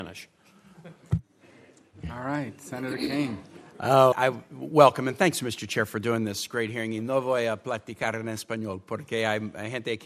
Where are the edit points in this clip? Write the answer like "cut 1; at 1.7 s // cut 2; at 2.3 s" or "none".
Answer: cut 1; at 4.1 s